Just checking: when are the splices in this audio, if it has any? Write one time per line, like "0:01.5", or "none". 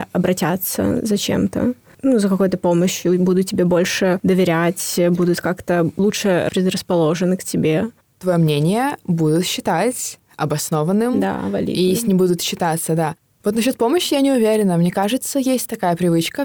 none